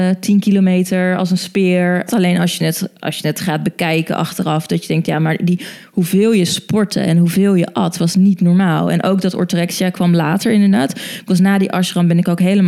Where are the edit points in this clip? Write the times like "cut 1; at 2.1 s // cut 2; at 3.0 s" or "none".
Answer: cut 1; at 2.1 s